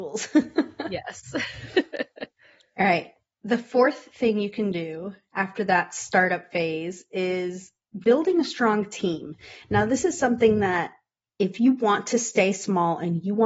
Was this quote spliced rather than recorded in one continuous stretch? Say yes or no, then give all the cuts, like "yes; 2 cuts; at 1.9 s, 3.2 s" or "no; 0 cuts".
no; 0 cuts